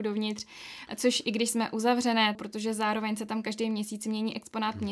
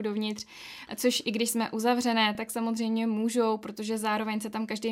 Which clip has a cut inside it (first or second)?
first